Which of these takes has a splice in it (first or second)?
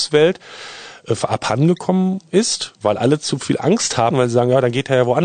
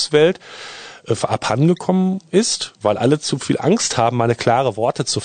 first